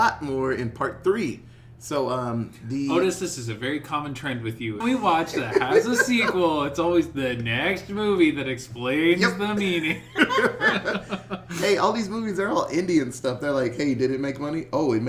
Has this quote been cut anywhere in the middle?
yes; 1 cut; at 4.8 s

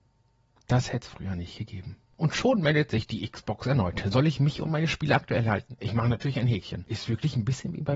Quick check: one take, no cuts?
no; 1 cut; at 5.8 s

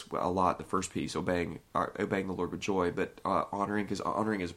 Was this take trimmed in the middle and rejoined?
no; 0 cuts

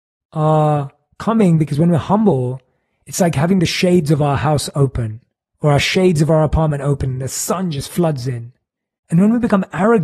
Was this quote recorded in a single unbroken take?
yes; 0 cuts

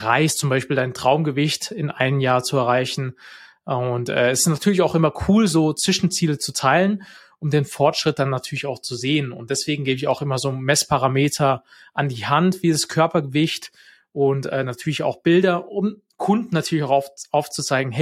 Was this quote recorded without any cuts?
yes; 0 cuts

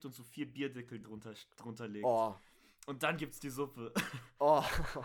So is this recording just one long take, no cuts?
yes; 0 cuts

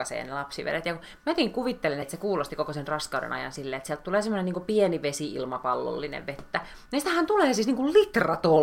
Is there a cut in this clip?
yes; 1 cut; at 2.0 s

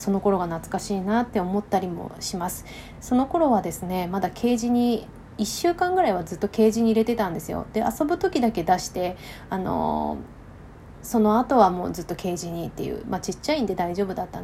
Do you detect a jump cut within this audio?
no; 0 cuts

